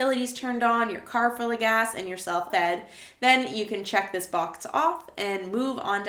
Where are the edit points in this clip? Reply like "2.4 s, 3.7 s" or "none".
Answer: 2.5 s